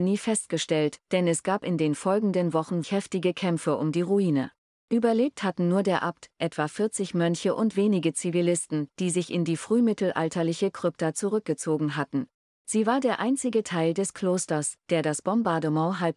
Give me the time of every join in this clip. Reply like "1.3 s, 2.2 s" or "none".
2.8 s

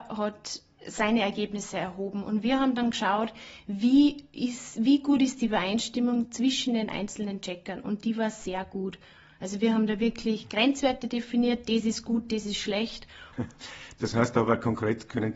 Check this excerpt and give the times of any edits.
none

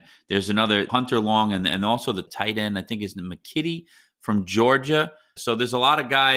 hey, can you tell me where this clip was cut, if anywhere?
5.4 s

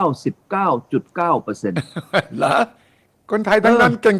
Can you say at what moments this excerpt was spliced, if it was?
none

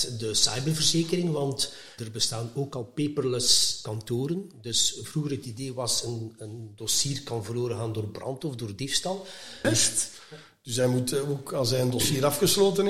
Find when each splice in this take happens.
9.6 s

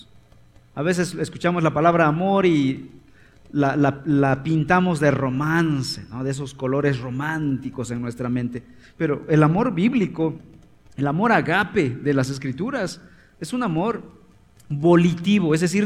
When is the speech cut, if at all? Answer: none

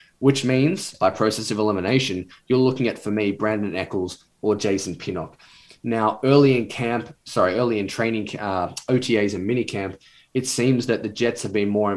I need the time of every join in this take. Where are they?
0.9 s

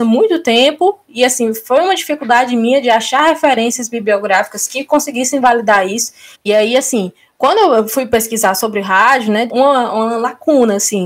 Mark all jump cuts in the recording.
6.3 s, 9.5 s

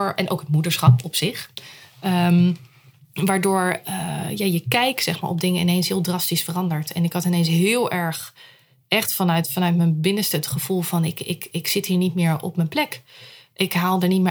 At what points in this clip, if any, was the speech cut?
none

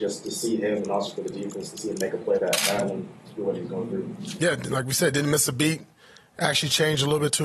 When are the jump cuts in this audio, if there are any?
2.4 s

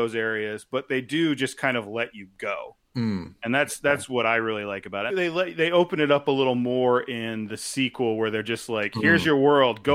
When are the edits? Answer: 5.1 s

